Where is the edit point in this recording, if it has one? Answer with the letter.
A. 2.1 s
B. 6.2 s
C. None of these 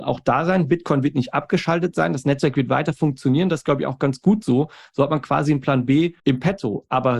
B